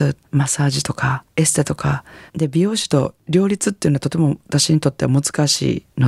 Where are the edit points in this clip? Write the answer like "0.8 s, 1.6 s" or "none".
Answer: 2.3 s